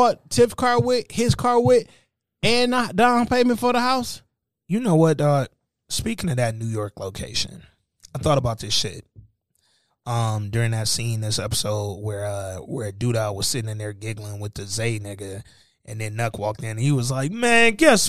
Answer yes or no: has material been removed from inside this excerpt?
no